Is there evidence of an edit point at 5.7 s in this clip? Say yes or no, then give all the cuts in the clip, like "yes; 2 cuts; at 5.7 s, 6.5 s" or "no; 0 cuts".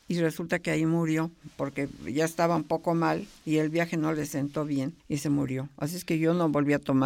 no; 0 cuts